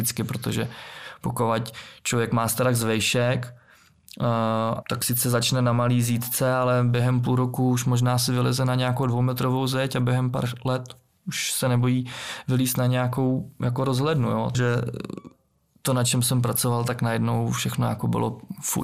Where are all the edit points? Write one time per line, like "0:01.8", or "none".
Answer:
0:04.8
0:14.5